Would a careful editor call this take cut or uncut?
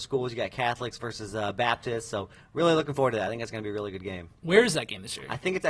uncut